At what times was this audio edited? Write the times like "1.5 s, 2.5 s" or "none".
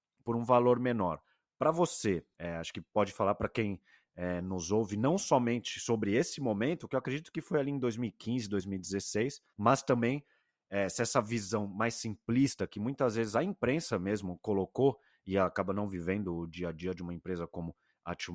2.3 s, 9.5 s